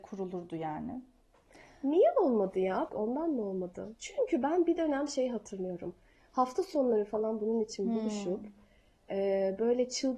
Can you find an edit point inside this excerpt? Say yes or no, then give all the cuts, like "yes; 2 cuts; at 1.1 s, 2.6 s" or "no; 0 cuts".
yes; 1 cut; at 2.9 s